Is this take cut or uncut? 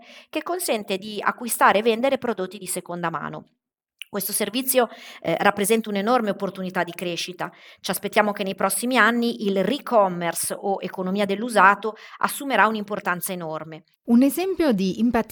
cut